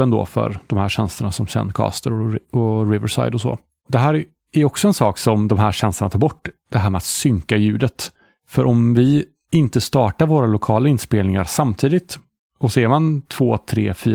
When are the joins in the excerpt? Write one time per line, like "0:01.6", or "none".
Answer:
0:03.8